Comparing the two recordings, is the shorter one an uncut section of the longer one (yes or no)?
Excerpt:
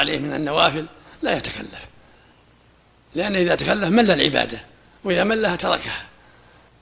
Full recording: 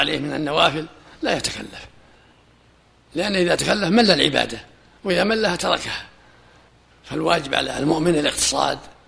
yes